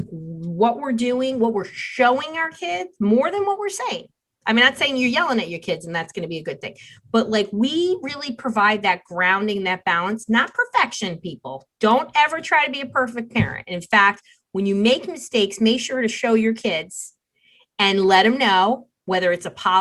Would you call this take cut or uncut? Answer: uncut